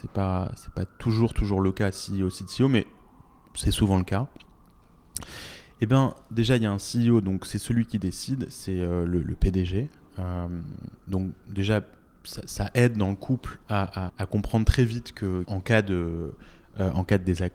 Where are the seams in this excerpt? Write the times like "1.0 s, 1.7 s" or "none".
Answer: 14.1 s, 15.4 s